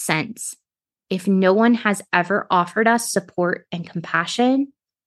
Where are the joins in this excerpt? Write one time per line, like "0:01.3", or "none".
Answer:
0:00.9